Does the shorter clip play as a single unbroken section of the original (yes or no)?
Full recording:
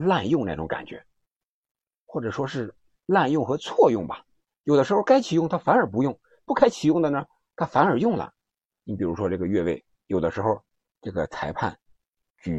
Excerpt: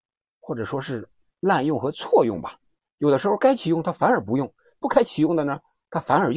yes